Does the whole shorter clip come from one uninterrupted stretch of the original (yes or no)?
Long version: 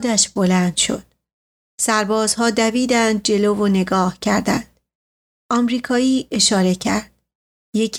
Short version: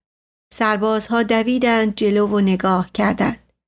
yes